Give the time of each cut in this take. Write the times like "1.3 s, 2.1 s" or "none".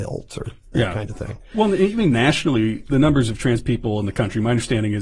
2.9 s